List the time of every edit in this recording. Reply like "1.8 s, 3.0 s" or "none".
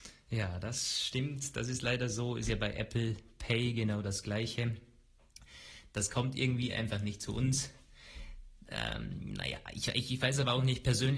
none